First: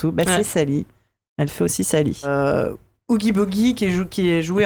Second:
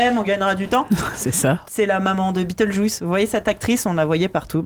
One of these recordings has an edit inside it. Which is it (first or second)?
second